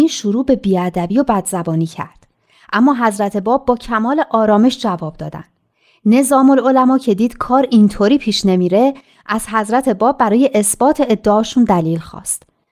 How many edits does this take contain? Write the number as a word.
zero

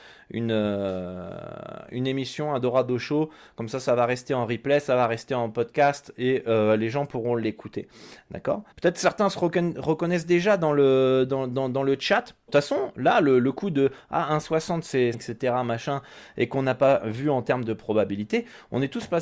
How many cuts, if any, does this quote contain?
three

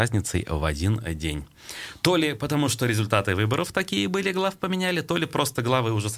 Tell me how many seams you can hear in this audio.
zero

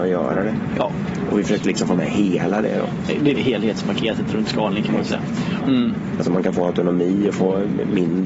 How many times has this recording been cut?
two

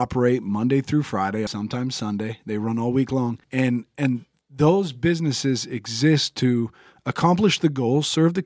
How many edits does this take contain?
two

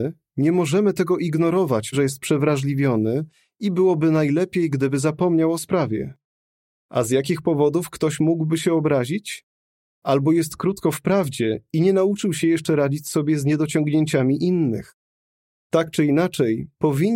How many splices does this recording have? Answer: two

